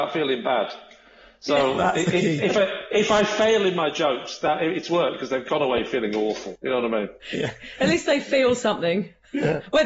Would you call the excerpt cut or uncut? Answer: uncut